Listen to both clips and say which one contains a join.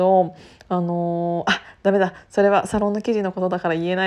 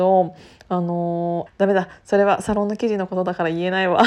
second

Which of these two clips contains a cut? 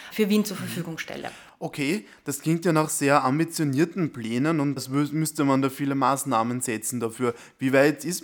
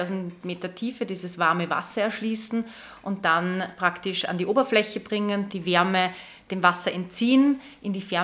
second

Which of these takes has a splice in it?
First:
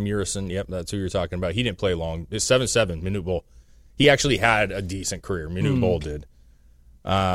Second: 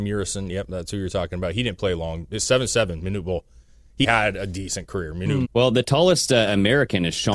second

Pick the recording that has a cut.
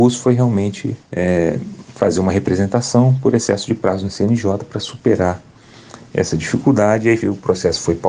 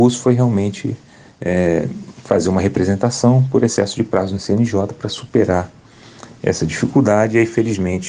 first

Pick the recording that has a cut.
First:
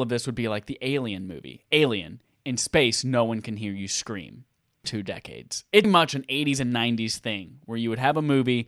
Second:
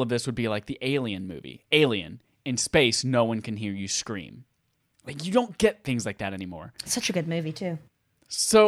first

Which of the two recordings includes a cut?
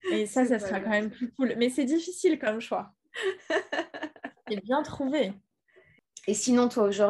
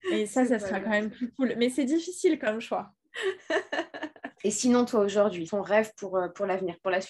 second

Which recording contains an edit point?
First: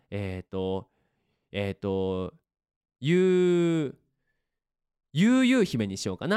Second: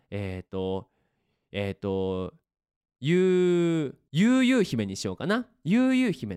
second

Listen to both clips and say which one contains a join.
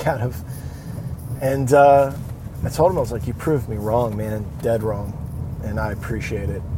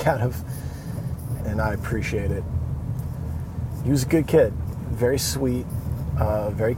second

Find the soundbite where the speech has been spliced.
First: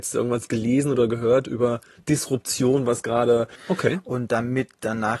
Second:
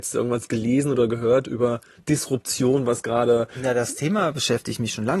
first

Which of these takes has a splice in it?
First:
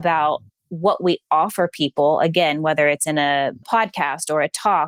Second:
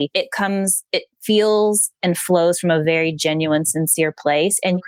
first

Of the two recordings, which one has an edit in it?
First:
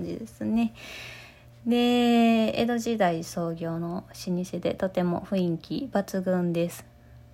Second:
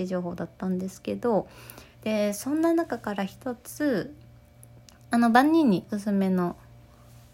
second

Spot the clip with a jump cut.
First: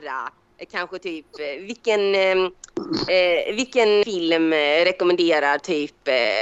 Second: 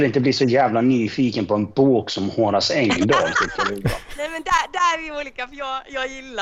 first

